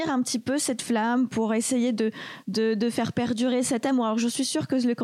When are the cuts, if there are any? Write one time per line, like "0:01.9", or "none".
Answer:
none